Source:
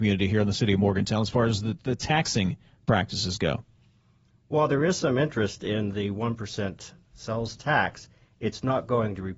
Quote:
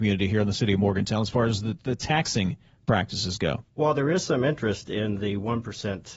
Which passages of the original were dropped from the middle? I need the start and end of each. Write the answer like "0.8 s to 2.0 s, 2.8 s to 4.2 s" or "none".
3.7 s to 4.4 s